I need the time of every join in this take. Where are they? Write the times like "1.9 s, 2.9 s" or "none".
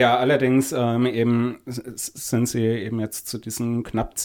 none